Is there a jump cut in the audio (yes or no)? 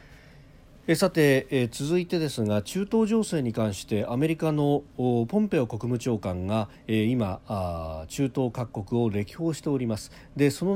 no